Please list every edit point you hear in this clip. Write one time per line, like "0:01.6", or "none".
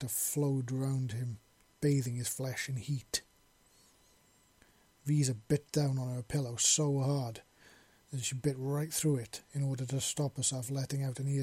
none